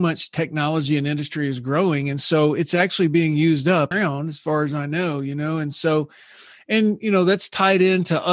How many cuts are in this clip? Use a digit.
1